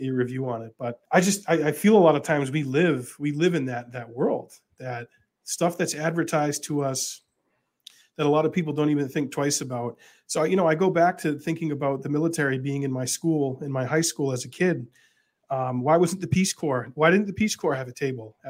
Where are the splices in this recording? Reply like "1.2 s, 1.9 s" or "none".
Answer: 1.1 s